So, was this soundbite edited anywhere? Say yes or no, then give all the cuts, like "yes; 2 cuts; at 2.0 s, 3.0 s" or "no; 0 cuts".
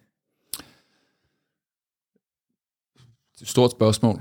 no; 0 cuts